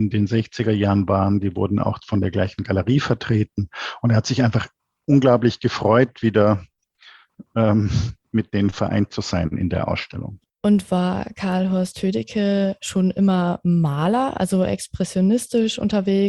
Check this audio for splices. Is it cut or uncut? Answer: uncut